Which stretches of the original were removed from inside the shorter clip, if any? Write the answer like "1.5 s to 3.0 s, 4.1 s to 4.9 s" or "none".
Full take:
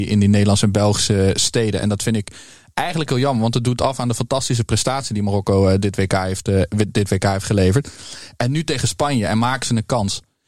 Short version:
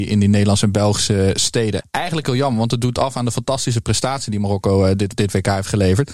1.8 s to 2.6 s, 6.0 s to 6.9 s